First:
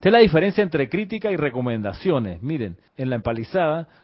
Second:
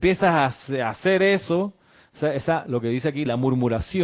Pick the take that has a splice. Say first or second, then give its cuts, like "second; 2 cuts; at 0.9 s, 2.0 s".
first; 1 cut; at 2.9 s